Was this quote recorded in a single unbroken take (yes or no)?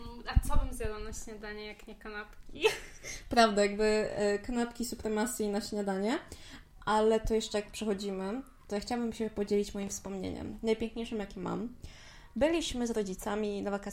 yes